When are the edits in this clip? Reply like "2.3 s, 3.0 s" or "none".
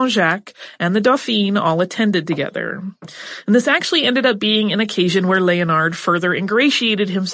none